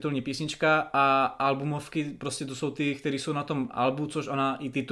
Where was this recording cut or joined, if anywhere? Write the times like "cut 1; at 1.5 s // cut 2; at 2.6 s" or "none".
none

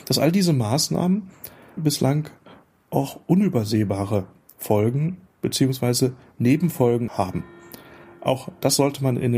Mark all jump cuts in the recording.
cut 1; at 1.8 s // cut 2; at 7.1 s

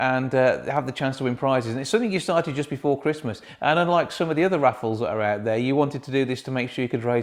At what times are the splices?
none

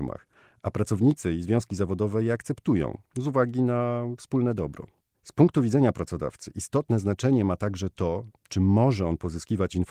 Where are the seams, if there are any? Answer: none

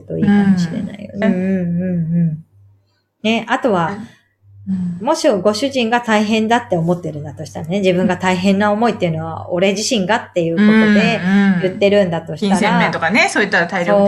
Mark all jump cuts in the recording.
cut 1; at 1.2 s

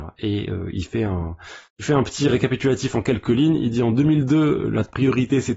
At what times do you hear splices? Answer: cut 1; at 1.7 s

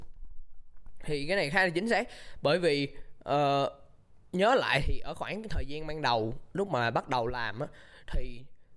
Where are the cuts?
cut 1; at 4.3 s

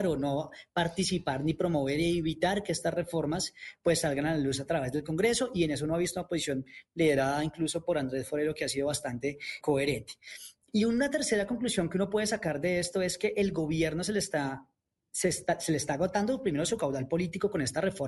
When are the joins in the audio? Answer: cut 1; at 9.6 s

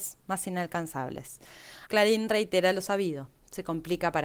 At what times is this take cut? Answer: cut 1; at 1.9 s

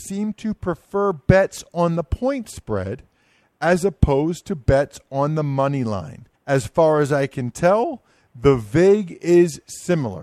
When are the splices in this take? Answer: cut 1; at 6.4 s

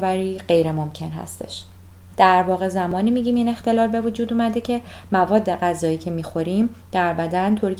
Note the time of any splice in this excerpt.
cut 1; at 2.1 s

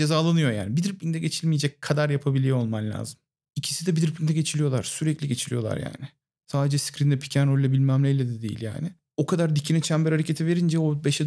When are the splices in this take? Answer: none

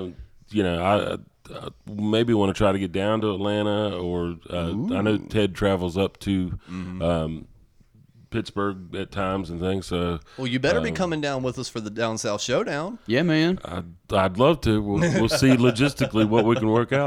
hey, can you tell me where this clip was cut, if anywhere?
none

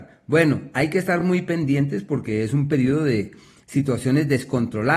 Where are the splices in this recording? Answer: none

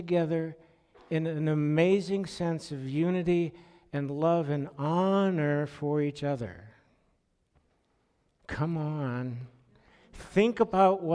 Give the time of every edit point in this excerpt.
none

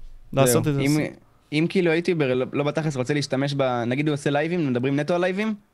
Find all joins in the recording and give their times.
none

